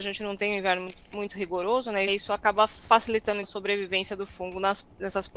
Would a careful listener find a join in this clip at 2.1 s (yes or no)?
yes